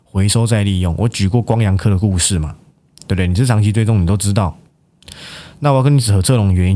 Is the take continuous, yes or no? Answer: yes